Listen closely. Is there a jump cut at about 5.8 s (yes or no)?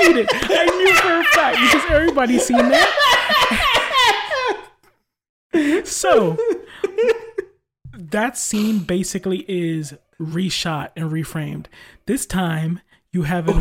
no